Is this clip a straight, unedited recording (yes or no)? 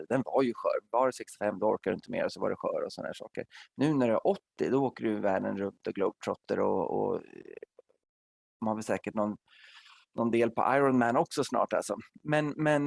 yes